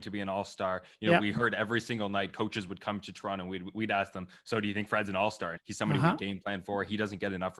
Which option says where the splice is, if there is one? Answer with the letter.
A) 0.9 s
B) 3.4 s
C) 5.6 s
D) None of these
C